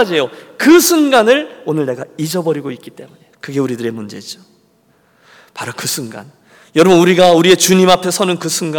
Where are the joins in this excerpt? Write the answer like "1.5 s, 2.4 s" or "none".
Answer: 3.3 s